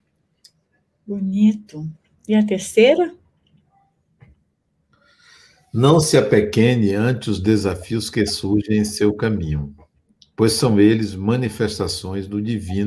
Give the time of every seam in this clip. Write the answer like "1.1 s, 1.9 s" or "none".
none